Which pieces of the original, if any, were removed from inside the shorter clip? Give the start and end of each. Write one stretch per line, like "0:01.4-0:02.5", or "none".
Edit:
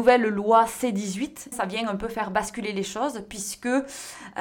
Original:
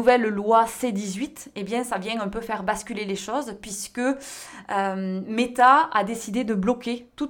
0:01.5-0:01.8